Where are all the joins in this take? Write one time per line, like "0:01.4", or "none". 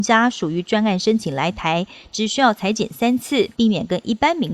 0:03.5